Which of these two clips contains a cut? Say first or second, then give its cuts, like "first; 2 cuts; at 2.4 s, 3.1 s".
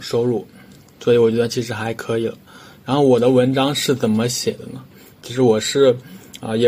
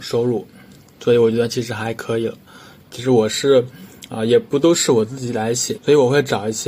second; 2 cuts; at 2.8 s, 5.8 s